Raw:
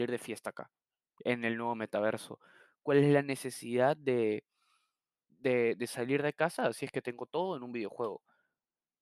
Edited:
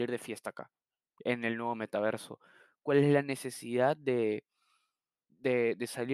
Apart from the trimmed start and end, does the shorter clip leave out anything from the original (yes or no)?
no